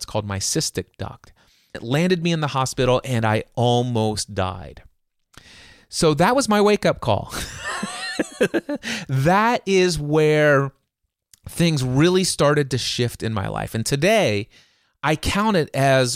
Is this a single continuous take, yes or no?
no